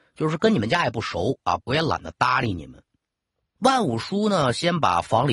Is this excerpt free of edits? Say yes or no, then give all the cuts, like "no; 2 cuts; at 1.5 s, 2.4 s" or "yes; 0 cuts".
no; 2 cuts; at 1.6 s, 3.5 s